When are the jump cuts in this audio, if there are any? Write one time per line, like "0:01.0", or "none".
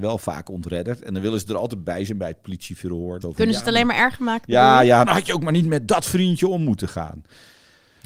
0:03.2
0:05.0